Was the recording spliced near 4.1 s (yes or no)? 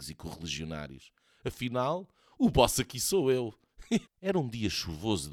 yes